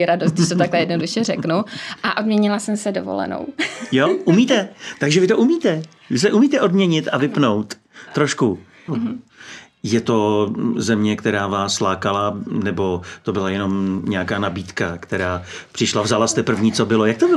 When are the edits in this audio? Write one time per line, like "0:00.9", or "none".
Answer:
0:08.9